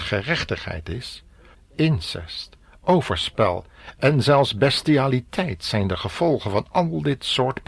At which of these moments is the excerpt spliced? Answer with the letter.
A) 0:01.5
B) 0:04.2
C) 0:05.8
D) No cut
A